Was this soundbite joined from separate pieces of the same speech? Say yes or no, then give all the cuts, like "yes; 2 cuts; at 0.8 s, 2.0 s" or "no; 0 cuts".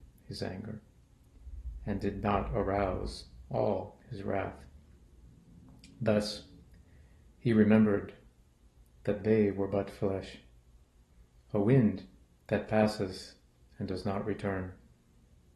no; 0 cuts